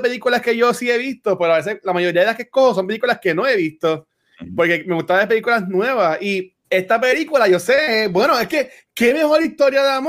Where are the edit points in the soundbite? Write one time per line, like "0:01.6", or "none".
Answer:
0:06.6